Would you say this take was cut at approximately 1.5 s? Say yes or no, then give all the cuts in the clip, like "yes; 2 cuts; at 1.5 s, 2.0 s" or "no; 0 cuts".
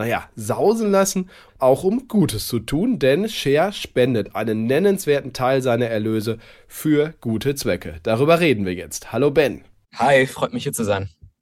yes; 1 cut; at 1.5 s